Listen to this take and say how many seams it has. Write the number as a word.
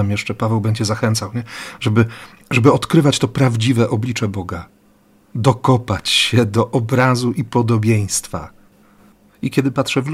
zero